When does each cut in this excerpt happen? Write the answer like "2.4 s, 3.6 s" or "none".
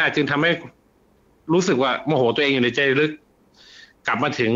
none